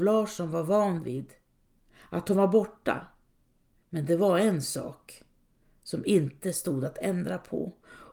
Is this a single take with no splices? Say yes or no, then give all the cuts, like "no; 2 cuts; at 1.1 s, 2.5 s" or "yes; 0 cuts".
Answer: no; 1 cut; at 3.7 s